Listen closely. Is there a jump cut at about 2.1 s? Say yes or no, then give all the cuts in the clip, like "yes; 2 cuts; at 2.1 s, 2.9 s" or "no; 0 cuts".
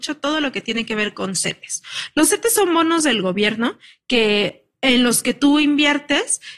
no; 0 cuts